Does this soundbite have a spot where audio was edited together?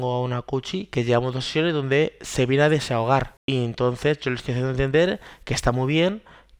yes; 1 cut; at 3.4 s

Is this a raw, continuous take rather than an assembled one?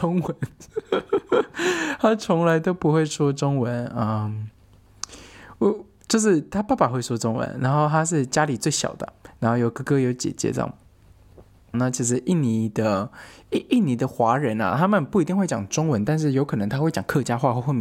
no; 1 cut; at 11.7 s

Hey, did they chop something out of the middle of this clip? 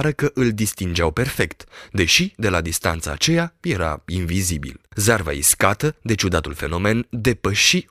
no; 0 cuts

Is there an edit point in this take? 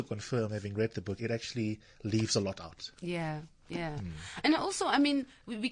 yes; 1 cut; at 1.2 s

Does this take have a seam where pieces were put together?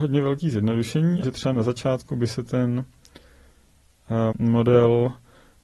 yes; 2 cuts; at 1.2 s, 4.3 s

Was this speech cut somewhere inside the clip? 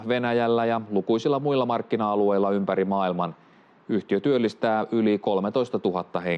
no; 0 cuts

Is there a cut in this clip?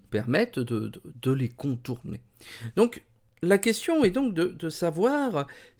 no; 0 cuts

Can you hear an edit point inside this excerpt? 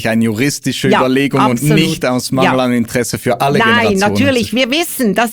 no; 0 cuts

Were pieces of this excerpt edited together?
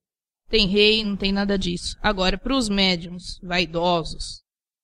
yes; 1 cut; at 1.0 s

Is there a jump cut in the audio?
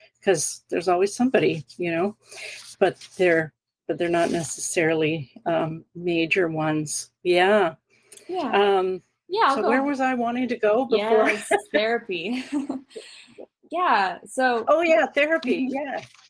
yes; 1 cut; at 2.7 s

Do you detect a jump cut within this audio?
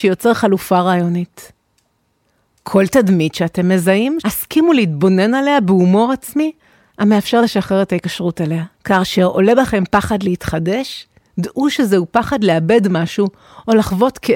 yes; 2 cuts; at 4.2 s, 8.7 s

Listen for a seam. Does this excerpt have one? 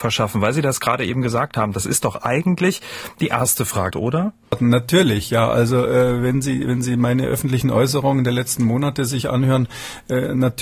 yes; 1 cut; at 3.9 s

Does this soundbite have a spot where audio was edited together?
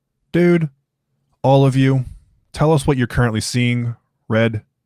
no; 0 cuts

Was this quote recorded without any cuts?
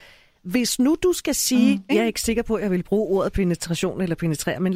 no; 1 cut; at 1.9 s

